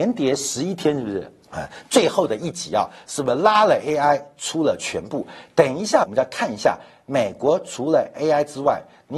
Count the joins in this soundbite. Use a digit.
2